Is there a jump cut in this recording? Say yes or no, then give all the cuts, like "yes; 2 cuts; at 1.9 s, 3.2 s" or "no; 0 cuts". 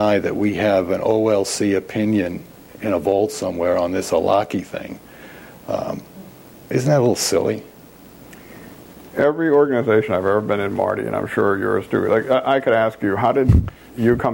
no; 0 cuts